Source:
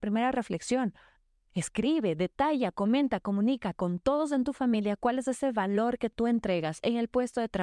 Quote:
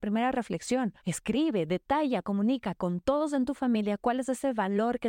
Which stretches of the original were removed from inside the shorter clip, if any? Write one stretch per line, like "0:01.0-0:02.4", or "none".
0:01.0-0:01.5
0:02.7-0:03.2